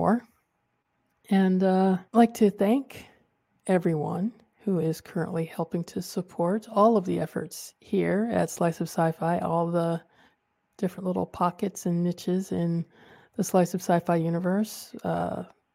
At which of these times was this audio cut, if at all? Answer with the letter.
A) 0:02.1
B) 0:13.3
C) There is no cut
A